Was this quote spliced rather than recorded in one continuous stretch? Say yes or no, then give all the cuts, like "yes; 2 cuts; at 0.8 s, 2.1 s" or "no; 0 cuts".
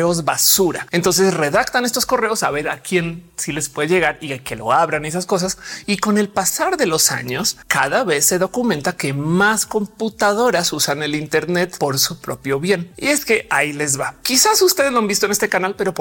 yes; 1 cut; at 5.8 s